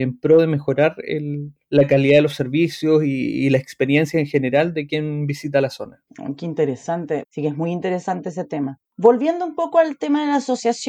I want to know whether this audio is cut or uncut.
cut